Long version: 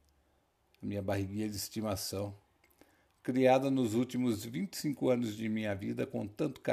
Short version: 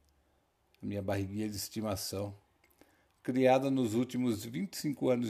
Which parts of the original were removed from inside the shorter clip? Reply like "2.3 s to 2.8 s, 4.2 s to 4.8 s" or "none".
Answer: none